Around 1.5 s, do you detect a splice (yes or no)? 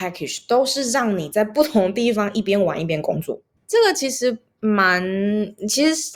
no